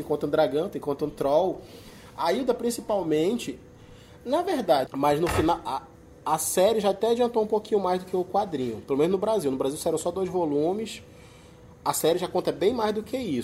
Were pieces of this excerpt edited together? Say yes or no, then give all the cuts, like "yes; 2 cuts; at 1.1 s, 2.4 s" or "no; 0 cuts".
yes; 1 cut; at 4.9 s